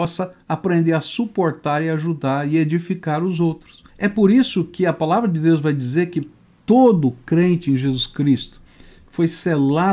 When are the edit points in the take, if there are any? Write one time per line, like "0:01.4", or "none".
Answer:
0:03.9

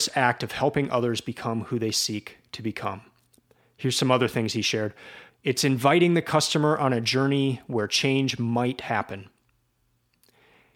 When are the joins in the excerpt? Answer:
0:05.3

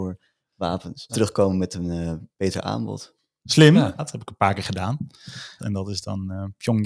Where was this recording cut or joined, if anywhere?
0:01.1
0:04.0
0:05.6

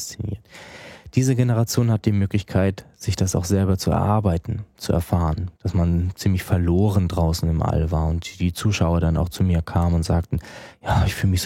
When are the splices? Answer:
0:05.6

